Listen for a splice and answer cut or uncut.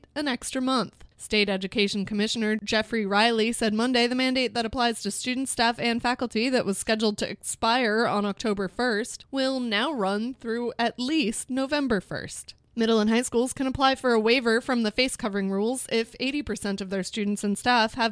cut